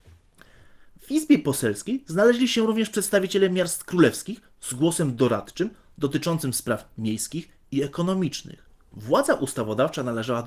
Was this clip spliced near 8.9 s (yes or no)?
yes